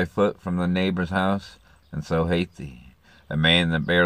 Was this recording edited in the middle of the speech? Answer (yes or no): yes